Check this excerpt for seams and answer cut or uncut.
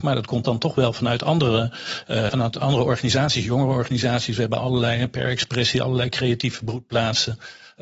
cut